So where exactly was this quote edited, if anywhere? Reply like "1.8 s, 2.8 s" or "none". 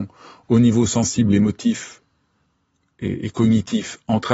none